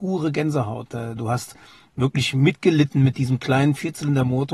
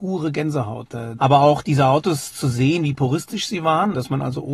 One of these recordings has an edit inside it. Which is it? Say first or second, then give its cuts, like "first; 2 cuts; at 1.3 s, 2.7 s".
second; 1 cut; at 1.2 s